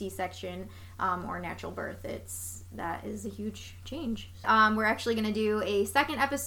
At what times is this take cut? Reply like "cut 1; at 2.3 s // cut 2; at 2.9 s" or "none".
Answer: cut 1; at 4.4 s